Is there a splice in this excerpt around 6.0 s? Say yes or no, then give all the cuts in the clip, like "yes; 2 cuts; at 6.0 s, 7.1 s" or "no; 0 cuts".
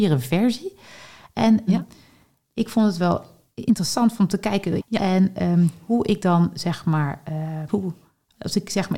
no; 3 cuts; at 1.7 s, 4.8 s, 7.7 s